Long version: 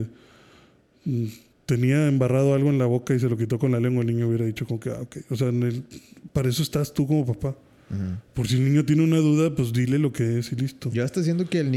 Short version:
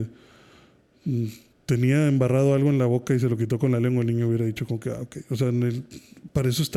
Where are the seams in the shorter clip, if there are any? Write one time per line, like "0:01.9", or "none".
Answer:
none